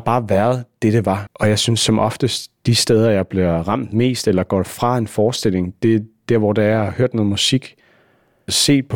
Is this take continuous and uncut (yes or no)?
no